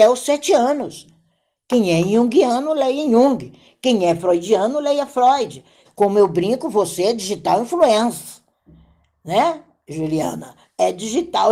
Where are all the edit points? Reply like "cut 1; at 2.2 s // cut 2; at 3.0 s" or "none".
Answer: cut 1; at 5.8 s